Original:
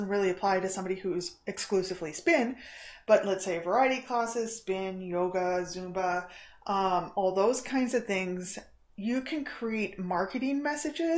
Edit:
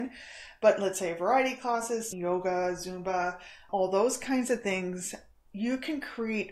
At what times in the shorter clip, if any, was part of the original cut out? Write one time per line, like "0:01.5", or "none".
0:02.1
0:03.7